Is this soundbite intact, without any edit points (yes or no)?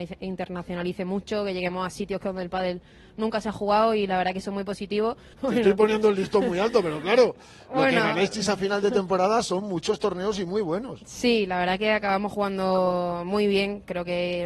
no